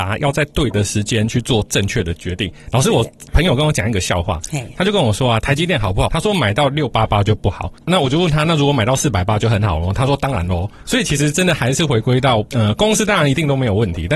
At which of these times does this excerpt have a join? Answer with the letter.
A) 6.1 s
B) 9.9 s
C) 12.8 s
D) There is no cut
A